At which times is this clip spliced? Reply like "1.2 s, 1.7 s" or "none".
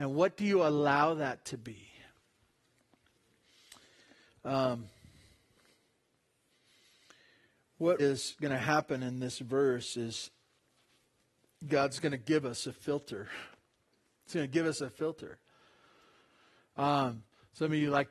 8.0 s